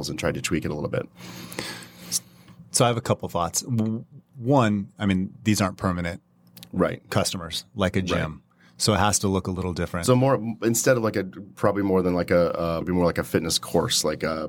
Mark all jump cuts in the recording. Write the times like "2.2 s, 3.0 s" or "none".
12.8 s